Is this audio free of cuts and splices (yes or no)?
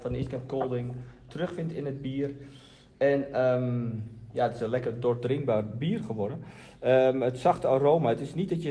yes